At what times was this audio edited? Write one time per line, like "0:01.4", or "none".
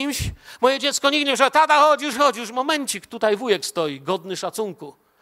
0:02.1